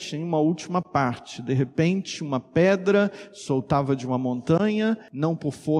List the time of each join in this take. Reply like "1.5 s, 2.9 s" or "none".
none